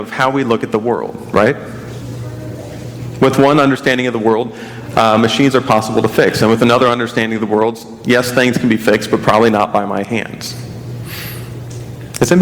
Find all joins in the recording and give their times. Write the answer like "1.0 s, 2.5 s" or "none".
none